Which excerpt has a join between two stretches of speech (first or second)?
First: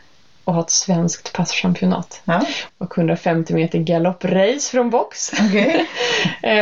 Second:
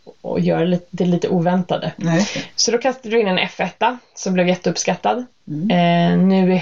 first